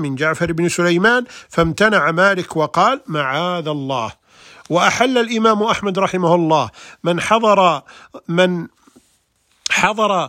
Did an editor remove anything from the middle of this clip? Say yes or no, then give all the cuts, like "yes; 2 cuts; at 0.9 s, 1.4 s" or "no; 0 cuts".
no; 0 cuts